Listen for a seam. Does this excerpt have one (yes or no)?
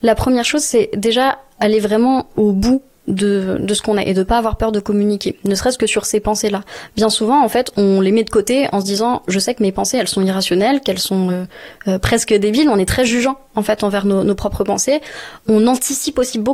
no